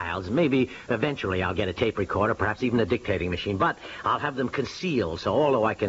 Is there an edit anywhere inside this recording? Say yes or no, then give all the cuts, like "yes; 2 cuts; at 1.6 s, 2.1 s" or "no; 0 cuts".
no; 0 cuts